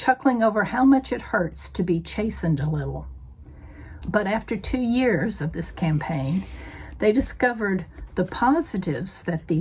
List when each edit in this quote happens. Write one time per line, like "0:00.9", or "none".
0:04.0